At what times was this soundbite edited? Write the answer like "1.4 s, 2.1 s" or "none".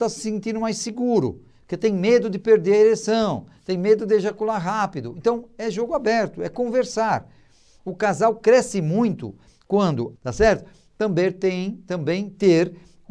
10.2 s